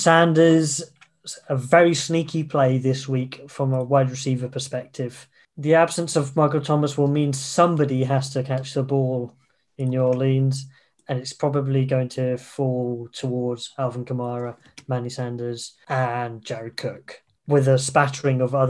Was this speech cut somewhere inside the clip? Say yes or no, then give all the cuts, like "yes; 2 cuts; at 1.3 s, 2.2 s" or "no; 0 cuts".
no; 0 cuts